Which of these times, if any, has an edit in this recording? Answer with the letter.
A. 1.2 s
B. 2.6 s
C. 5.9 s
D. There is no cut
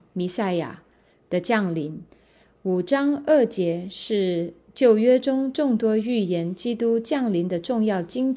D